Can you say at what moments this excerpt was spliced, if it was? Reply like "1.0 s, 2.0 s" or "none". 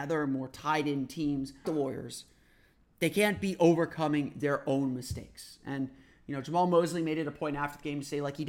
1.6 s